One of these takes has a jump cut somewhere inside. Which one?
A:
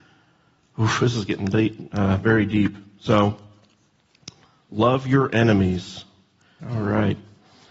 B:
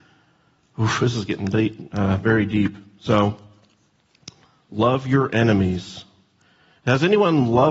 A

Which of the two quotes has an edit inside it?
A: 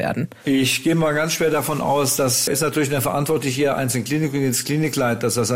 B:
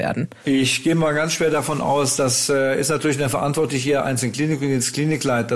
A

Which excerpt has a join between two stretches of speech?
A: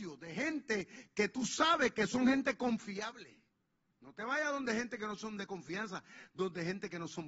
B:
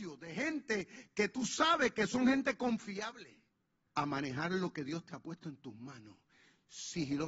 B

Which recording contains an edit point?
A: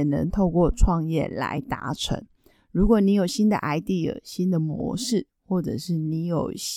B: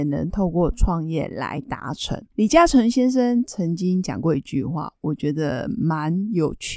B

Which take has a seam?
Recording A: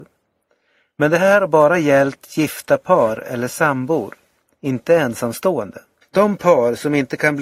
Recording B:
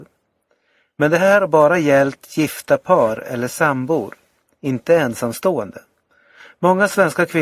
A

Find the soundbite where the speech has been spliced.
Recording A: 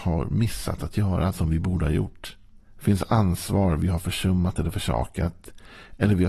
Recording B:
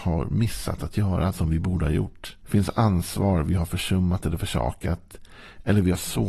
B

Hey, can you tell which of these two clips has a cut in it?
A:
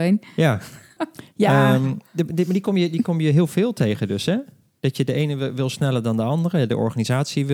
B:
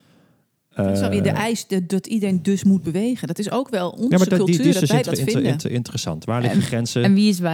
A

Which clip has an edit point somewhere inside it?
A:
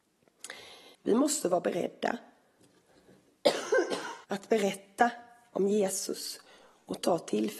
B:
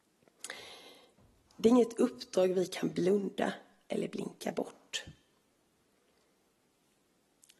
A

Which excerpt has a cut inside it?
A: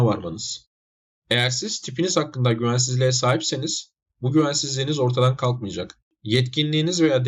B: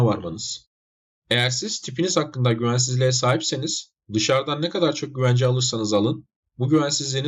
A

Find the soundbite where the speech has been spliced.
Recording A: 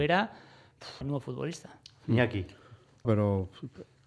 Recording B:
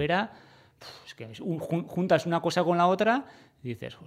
A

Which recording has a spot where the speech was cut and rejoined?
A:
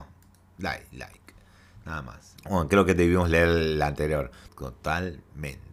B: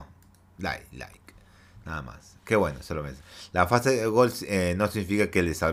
A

